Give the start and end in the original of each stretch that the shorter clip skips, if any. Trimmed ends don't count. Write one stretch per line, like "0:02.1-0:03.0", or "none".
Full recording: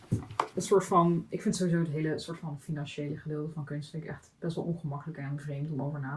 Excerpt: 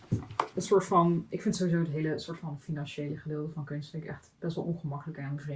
none